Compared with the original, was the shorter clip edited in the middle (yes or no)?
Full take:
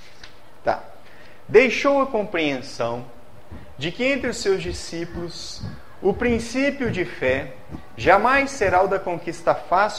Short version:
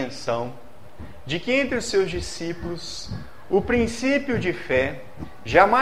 no